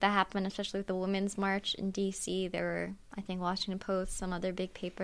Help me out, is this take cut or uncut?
uncut